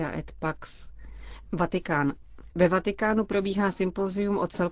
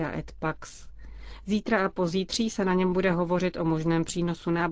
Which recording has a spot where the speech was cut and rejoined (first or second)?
first